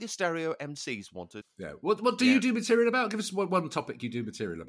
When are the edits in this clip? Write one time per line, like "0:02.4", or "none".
0:01.4